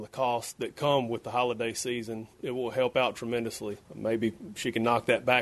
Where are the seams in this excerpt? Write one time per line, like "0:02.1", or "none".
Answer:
0:03.8